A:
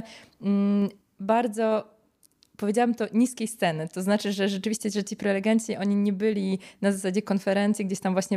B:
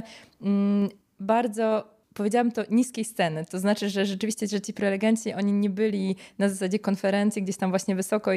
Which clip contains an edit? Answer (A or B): B